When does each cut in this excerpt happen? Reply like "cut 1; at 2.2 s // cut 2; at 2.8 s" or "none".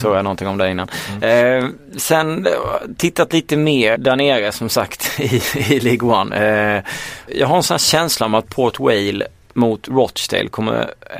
cut 1; at 4.0 s // cut 2; at 7.3 s